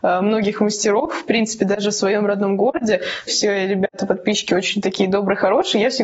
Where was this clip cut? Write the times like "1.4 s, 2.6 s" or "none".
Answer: 3.3 s